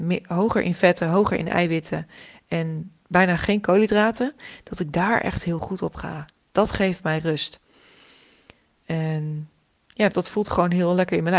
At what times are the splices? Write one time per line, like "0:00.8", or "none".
0:10.1